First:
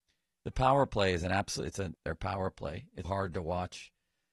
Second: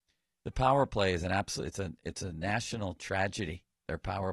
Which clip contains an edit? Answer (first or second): first